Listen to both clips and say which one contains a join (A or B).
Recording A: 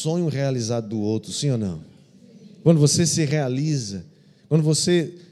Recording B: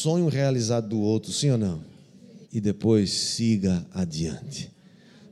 B